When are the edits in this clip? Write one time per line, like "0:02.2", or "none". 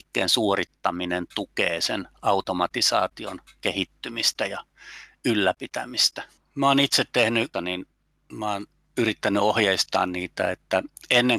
0:06.4
0:07.5

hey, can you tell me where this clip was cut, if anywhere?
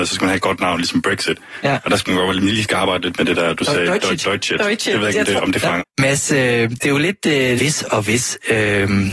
0:05.8
0:07.6

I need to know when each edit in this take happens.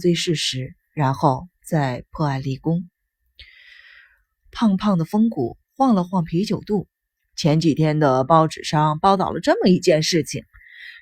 0:04.4

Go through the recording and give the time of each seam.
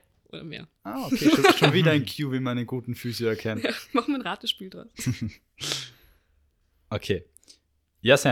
none

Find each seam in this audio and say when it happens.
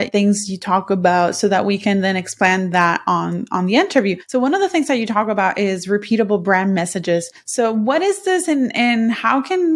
none

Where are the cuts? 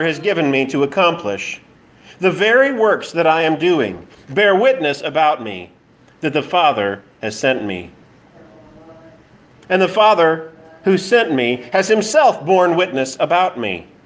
none

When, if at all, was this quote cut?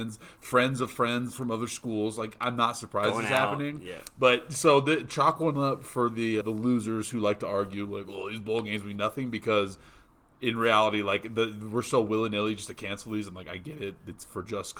0:06.4

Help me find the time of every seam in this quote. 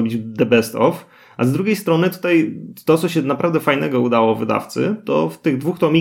none

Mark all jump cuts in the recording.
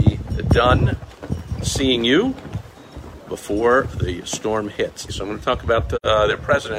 0:03.2
0:05.1

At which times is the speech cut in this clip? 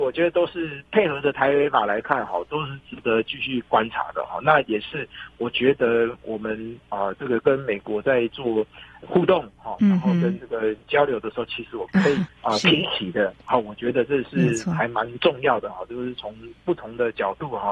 none

